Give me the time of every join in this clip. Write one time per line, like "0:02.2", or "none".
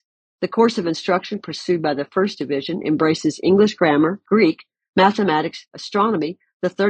0:04.2
0:05.7